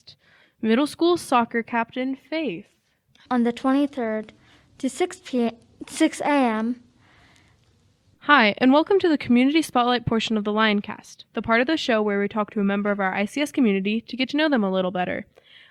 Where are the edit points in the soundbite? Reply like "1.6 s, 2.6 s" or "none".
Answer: 3.3 s, 8.1 s